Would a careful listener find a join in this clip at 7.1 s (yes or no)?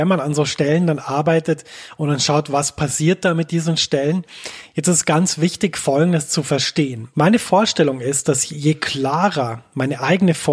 yes